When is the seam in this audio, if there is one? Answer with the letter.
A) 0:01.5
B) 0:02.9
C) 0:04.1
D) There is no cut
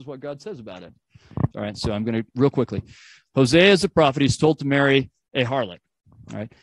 A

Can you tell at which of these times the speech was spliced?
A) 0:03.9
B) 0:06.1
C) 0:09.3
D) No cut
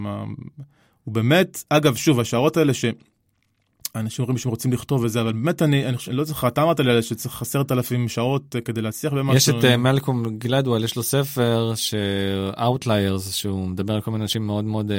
B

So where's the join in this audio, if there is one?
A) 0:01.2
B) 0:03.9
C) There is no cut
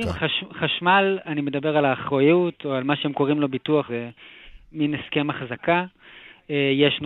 B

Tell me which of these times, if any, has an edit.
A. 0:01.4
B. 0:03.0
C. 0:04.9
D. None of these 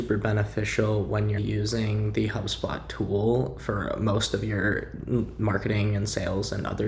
A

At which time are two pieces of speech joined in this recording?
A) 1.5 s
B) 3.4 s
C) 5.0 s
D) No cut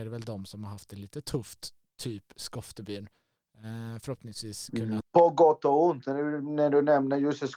C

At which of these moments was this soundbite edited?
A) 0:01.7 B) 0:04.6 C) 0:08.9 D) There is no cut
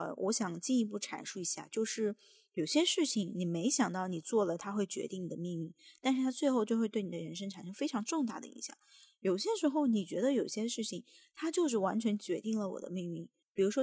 D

